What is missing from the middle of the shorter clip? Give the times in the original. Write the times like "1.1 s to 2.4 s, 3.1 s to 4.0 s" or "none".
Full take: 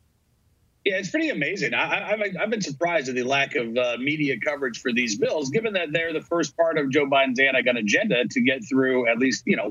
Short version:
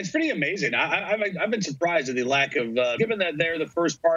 4.0 s to 5.5 s